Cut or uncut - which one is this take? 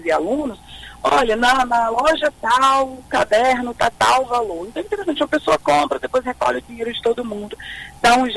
uncut